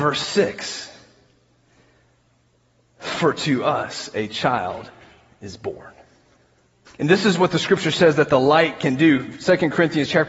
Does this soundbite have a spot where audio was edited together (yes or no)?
yes